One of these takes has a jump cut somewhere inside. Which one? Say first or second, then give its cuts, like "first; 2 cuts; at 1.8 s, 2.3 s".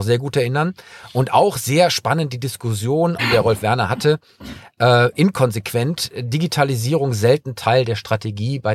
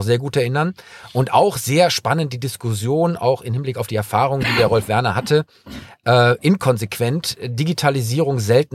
first; 1 cut; at 3.2 s